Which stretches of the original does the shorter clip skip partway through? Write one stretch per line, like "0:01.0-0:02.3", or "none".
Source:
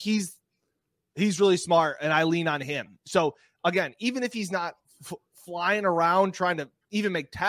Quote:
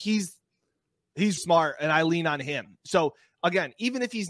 0:01.4-0:01.6